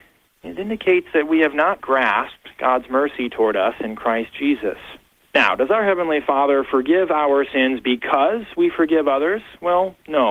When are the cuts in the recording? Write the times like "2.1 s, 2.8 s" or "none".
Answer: 1.8 s, 5.2 s